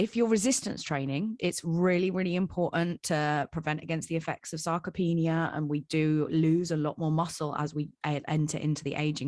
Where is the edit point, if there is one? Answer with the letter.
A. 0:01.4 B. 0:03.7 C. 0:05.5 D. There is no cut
A